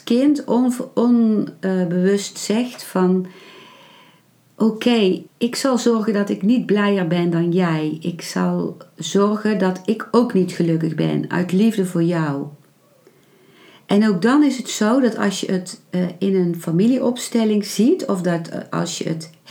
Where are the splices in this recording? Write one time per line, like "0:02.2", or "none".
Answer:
0:05.3